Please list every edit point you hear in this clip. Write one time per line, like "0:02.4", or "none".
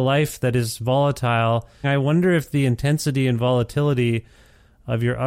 0:01.8